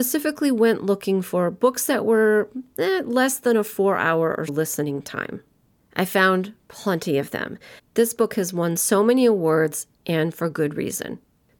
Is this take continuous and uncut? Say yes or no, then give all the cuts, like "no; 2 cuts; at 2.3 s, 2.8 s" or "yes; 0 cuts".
no; 2 cuts; at 4.5 s, 7.8 s